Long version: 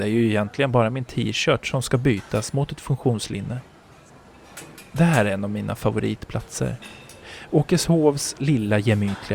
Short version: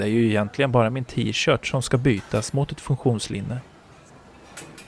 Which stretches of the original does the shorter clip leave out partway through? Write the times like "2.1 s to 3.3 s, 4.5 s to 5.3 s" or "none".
none